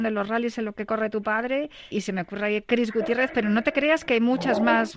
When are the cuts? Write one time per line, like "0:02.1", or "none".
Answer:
0:01.9